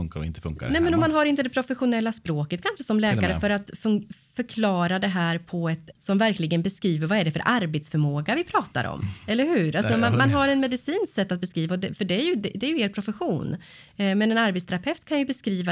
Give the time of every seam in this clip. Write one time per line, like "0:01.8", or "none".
0:05.9